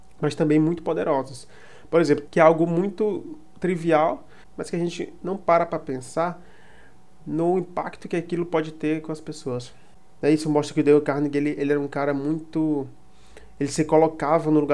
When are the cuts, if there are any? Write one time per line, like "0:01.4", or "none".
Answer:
0:02.3